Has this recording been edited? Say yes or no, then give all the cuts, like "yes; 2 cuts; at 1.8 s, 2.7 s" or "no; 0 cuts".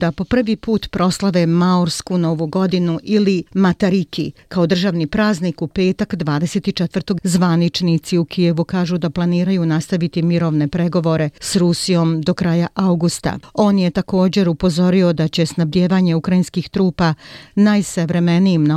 yes; 2 cuts; at 7.2 s, 13.4 s